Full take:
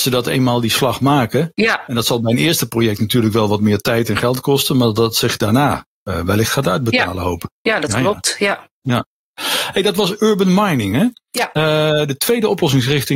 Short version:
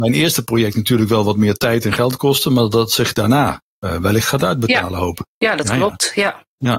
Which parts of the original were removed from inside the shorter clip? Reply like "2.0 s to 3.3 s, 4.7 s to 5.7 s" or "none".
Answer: none